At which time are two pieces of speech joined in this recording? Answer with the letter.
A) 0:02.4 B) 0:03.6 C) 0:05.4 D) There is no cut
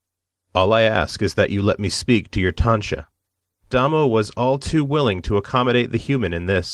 B